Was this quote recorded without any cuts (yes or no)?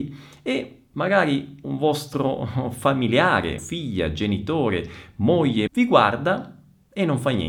no